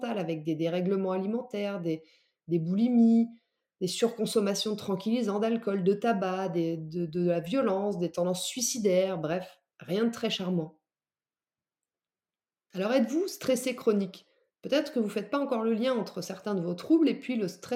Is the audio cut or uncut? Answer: uncut